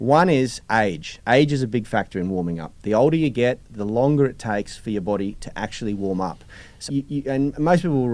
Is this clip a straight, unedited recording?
no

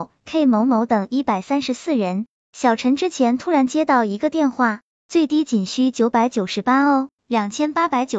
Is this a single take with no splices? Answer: no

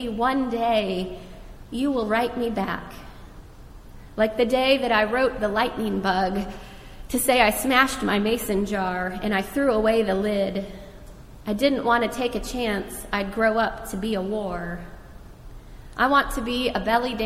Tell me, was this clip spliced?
no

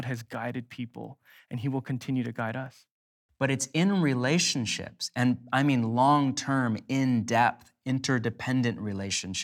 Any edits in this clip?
yes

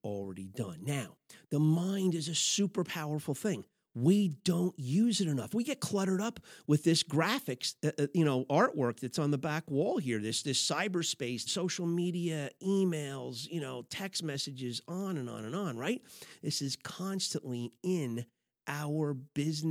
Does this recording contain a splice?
yes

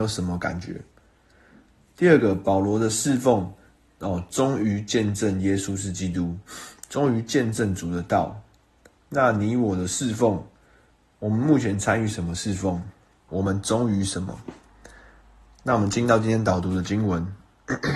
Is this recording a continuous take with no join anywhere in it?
no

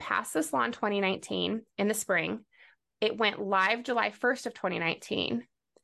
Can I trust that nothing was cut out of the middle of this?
yes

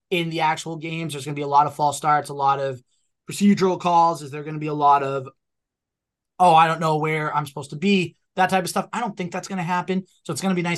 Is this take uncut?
yes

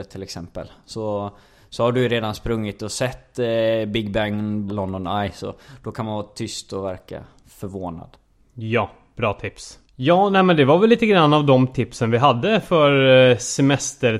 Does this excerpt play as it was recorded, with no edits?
no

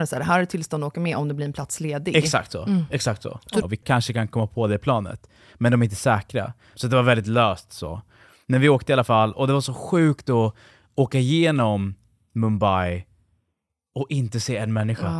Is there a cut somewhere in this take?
yes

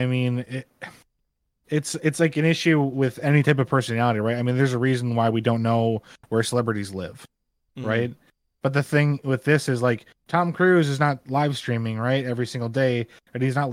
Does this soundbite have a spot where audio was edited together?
no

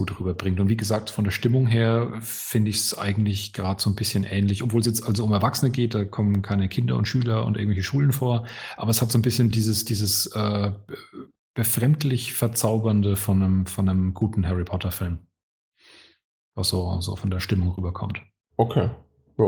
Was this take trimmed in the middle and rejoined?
no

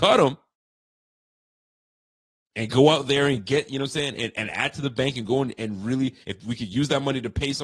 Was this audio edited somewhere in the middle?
no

